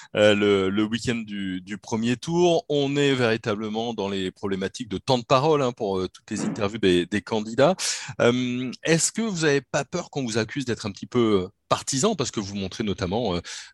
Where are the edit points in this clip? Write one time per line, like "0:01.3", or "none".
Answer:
none